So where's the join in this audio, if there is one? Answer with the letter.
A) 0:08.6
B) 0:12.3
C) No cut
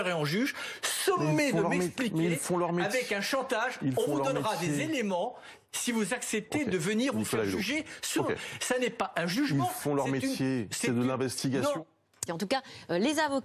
B